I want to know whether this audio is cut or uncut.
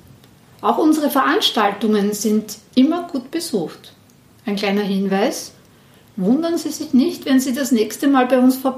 uncut